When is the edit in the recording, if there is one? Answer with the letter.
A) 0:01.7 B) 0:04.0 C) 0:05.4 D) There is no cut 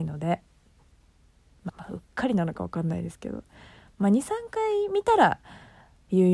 A